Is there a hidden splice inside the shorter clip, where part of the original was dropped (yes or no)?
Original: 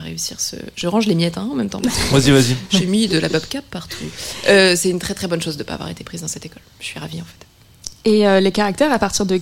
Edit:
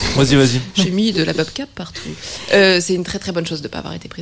no